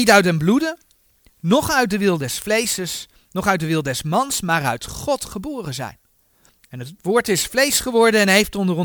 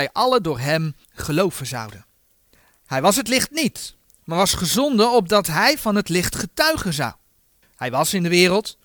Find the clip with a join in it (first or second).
second